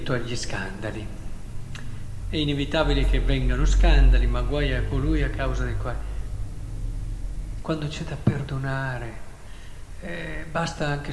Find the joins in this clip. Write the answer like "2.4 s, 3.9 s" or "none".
2.2 s, 7.6 s